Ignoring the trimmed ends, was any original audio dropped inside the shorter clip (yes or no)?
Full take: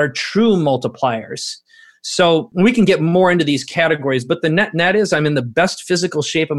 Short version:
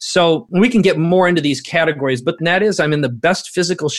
yes